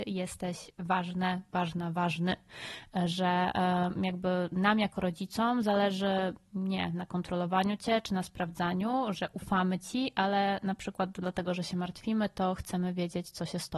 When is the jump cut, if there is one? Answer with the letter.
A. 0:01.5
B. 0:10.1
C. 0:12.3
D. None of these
D